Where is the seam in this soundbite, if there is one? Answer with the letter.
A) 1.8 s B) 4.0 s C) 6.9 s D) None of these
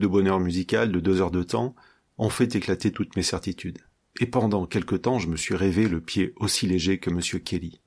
D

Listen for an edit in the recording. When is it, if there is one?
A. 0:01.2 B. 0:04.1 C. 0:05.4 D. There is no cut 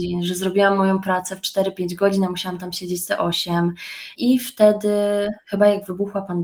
B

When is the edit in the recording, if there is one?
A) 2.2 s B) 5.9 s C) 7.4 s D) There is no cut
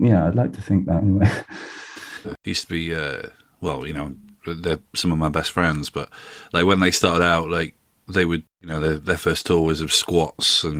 A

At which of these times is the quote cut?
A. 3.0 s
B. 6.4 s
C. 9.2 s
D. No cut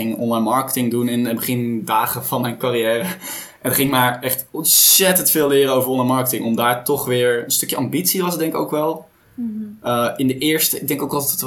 C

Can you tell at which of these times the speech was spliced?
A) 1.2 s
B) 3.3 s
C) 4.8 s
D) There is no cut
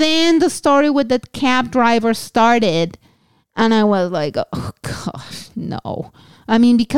D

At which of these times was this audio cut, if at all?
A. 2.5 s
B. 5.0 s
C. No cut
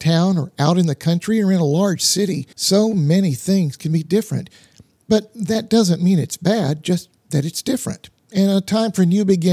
A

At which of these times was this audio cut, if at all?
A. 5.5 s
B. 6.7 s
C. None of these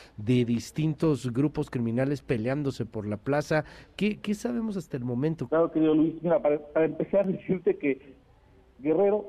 A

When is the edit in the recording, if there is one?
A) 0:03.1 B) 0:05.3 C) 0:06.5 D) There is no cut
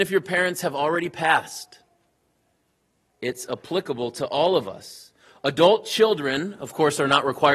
D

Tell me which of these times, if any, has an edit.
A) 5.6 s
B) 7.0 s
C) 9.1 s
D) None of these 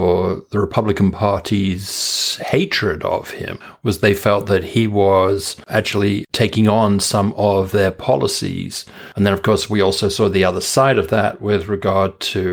D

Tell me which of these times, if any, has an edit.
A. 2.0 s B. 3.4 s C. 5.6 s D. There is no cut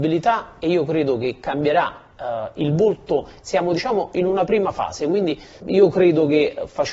C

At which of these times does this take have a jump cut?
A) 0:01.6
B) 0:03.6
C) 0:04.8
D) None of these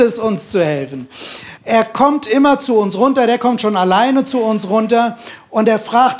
A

